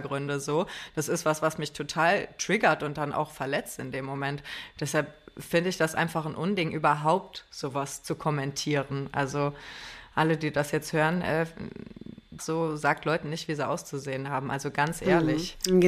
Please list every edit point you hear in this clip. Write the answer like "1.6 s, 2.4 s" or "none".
12.4 s